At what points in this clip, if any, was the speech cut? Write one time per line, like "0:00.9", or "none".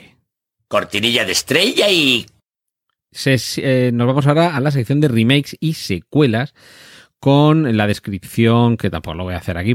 none